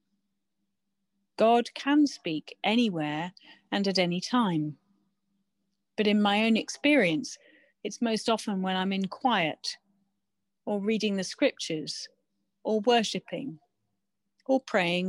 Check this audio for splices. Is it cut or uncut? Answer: cut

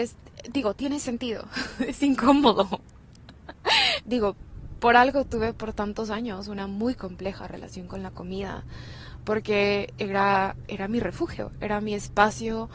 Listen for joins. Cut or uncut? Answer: cut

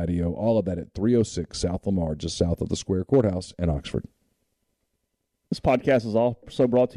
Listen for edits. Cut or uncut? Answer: uncut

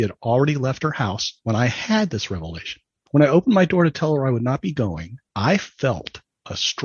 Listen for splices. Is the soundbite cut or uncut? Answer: cut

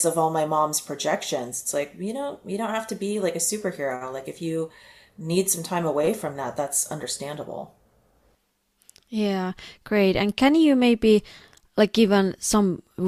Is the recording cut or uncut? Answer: uncut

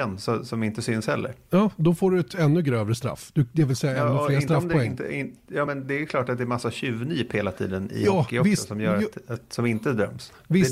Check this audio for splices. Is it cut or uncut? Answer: uncut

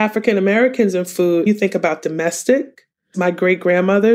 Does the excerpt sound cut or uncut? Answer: cut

